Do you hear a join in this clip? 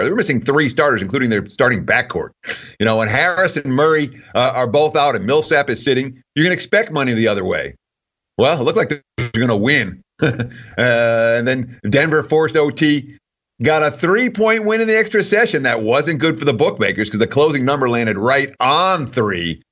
no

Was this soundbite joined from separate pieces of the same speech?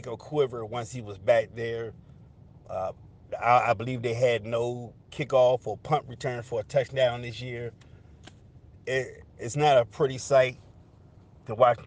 no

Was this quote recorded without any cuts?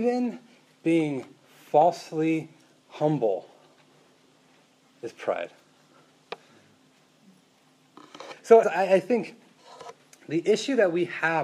no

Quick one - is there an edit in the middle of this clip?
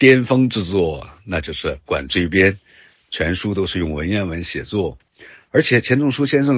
no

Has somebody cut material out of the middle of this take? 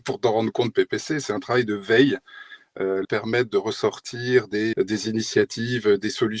yes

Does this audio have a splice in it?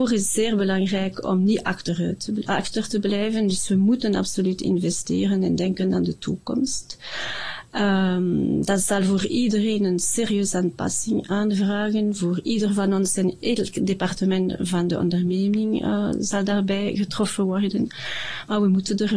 no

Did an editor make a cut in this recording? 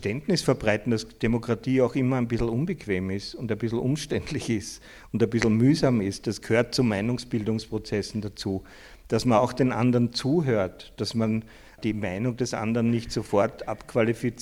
no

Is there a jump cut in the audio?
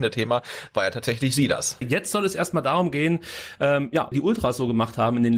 yes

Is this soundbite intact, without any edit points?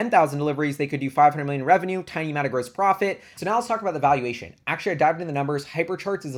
no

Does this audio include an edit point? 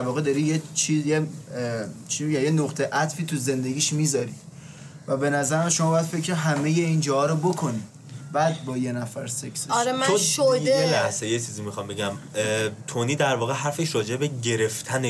no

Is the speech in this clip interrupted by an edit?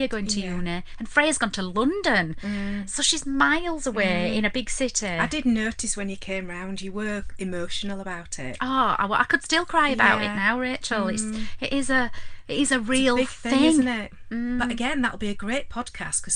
no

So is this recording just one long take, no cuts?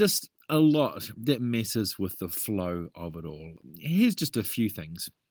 yes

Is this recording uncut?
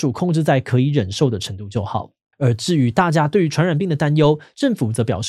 no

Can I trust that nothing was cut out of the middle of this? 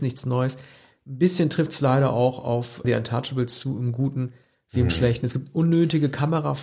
no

